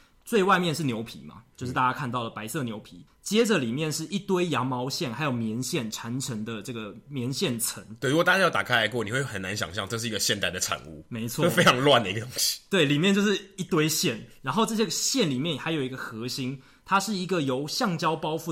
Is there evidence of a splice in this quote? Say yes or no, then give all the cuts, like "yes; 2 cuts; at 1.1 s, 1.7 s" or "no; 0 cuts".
yes; 1 cut; at 3.1 s